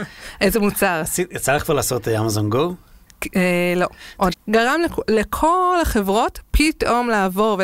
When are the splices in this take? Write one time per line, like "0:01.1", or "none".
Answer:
0:04.3